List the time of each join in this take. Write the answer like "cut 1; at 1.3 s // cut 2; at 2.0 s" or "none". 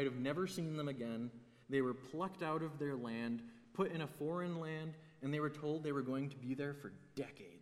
none